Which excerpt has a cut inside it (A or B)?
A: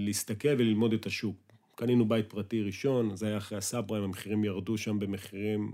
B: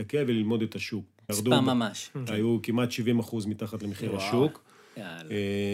B